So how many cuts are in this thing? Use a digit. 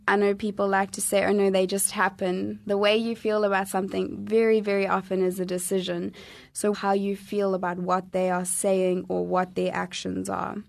1